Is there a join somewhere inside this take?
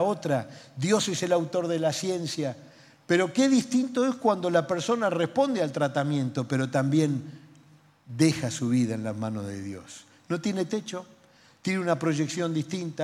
no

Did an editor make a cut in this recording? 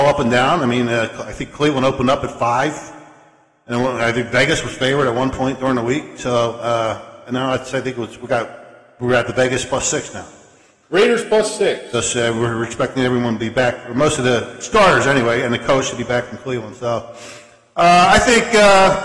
no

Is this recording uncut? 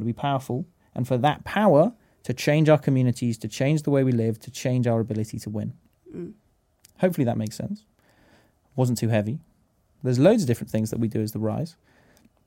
no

